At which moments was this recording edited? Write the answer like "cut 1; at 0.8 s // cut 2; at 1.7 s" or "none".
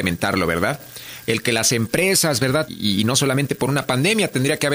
cut 1; at 1.3 s // cut 2; at 2.7 s